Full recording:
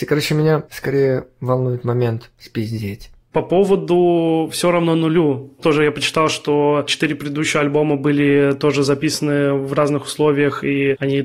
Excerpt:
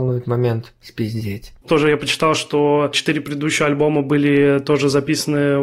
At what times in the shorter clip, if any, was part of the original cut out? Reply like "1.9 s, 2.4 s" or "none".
1.6 s